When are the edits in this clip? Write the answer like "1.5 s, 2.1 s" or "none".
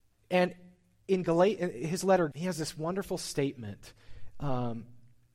2.3 s

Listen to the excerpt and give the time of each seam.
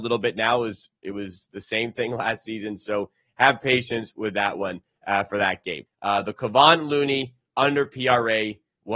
5.9 s

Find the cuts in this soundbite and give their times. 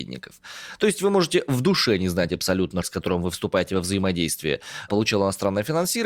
2.8 s

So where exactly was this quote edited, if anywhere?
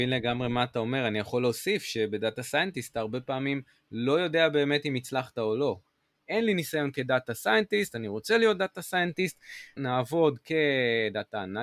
6.2 s, 9.8 s

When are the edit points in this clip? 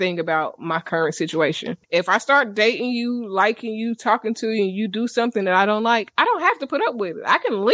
1.8 s

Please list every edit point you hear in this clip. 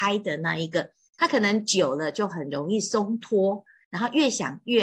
3.8 s

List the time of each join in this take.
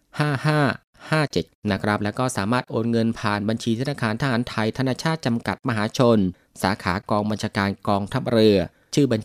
none

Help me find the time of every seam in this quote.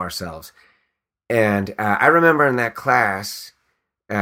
none

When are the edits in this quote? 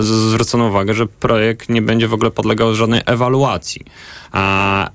1.1 s

